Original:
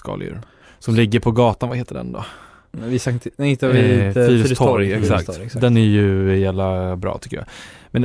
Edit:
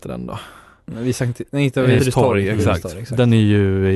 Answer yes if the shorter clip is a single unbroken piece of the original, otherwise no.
no